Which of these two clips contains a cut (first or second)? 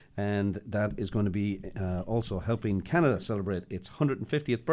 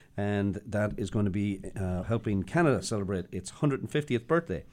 second